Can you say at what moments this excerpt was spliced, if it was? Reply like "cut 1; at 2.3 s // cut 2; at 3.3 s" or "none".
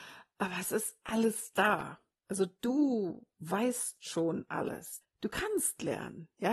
cut 1; at 5.0 s